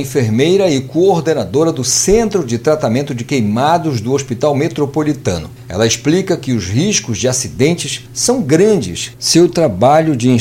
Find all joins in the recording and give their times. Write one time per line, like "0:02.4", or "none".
none